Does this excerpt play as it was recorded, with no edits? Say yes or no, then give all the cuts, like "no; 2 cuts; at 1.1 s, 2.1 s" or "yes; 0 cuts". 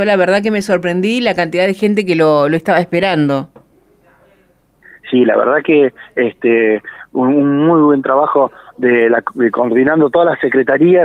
yes; 0 cuts